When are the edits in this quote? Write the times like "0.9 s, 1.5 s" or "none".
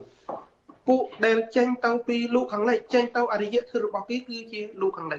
none

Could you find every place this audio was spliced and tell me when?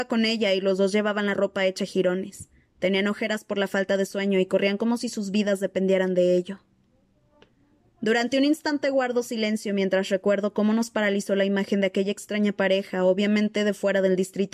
none

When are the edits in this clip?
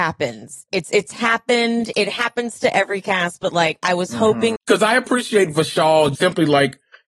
4.6 s, 6.2 s

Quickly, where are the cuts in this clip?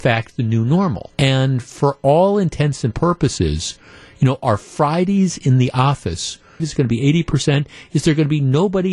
1.1 s, 6.6 s

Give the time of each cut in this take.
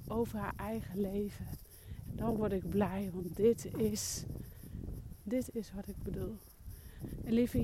2.1 s, 5.2 s

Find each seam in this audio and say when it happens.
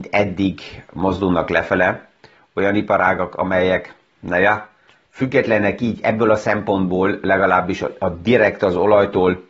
none

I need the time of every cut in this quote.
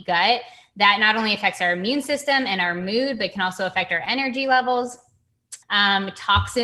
5.6 s

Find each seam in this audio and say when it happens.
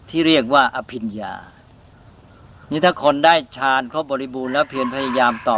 none

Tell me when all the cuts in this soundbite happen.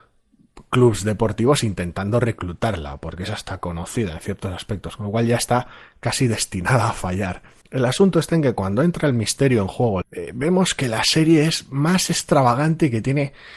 7.6 s, 10.0 s

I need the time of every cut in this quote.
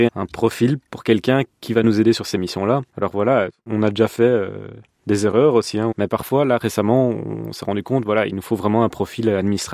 2.9 s, 5.9 s

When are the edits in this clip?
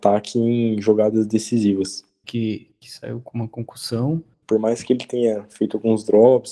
2.2 s, 4.4 s

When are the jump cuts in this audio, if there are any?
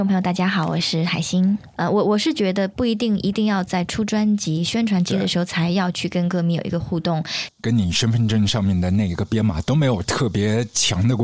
7.5 s

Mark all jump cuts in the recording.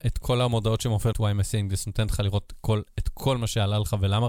1.1 s

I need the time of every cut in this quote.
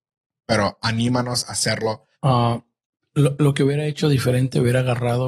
2.1 s

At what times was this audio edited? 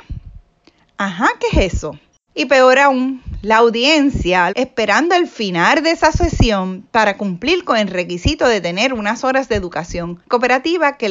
2.3 s, 4.5 s

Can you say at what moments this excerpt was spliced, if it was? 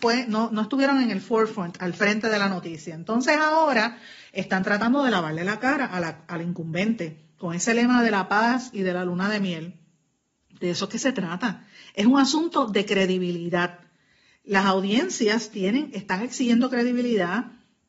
none

